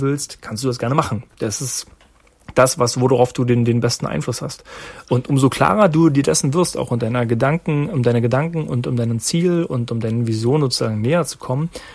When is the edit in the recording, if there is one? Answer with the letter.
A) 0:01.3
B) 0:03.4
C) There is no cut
A